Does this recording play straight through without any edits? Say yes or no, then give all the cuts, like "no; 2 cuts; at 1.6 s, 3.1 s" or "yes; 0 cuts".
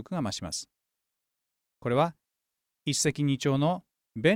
yes; 0 cuts